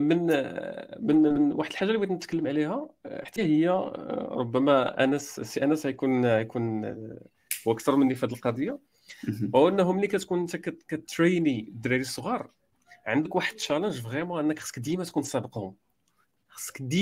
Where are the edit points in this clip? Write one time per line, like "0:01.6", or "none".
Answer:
0:03.4